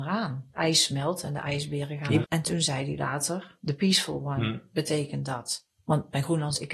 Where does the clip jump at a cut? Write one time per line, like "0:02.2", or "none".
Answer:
0:02.2